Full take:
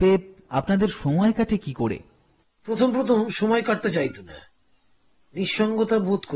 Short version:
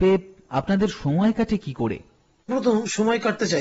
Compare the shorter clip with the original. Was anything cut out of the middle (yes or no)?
yes